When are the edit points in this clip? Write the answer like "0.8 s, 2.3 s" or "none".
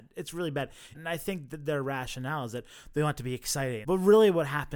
0.9 s, 3.8 s